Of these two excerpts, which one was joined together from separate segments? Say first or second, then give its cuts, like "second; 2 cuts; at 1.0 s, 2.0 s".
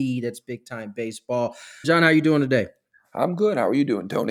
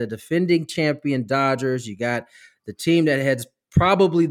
first; 1 cut; at 1.8 s